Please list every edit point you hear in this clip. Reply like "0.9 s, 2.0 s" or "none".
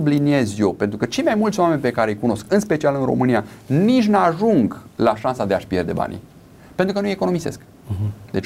none